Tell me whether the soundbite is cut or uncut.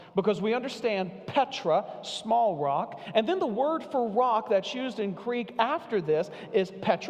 uncut